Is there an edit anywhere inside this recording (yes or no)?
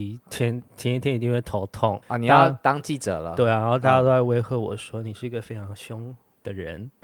yes